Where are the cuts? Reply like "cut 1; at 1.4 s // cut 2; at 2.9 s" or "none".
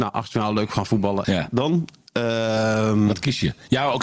cut 1; at 1.2 s